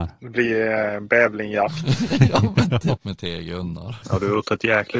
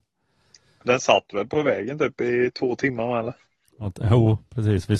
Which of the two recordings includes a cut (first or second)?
first